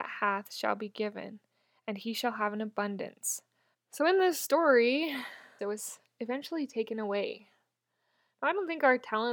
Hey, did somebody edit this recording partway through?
yes; 2 cuts; at 3.7 s, 5.6 s

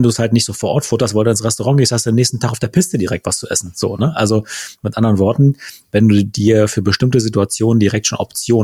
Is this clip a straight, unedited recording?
yes; 0 cuts

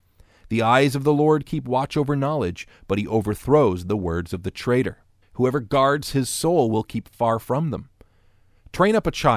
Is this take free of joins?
no; 1 cut; at 5.2 s

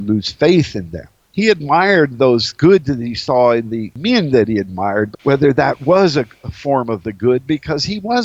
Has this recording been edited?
yes; 2 cuts; at 1.2 s, 5.1 s

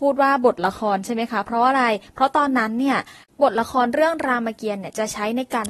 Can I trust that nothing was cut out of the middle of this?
yes; 0 cuts

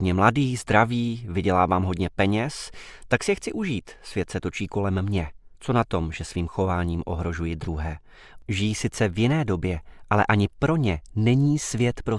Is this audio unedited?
no; 2 cuts; at 5.5 s, 8.4 s

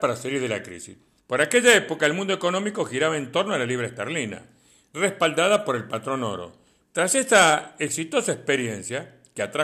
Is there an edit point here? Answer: yes; 2 cuts; at 1.2 s, 6.8 s

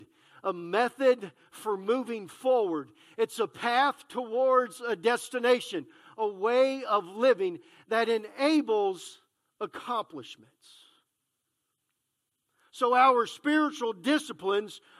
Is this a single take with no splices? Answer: yes; 0 cuts

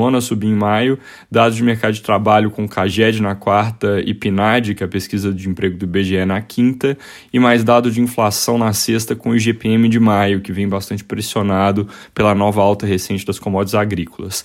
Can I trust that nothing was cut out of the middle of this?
yes; 0 cuts

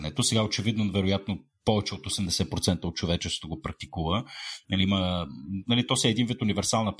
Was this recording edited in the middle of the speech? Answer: no; 0 cuts

